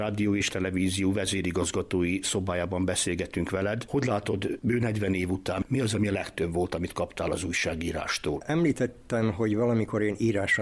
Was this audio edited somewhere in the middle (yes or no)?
no